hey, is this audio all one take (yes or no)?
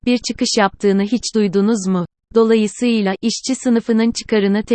no